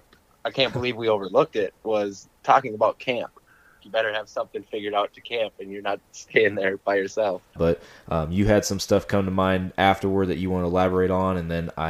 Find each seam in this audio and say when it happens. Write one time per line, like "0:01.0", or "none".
0:03.8
0:06.0
0:07.6